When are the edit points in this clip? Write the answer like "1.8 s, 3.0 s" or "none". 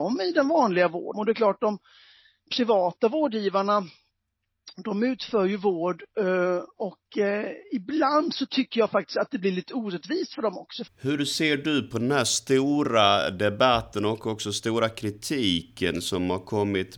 1.1 s, 10.9 s